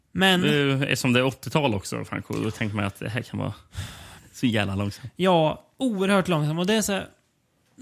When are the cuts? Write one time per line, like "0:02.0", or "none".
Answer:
0:04.2